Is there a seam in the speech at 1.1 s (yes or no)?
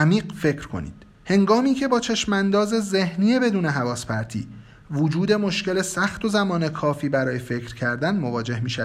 yes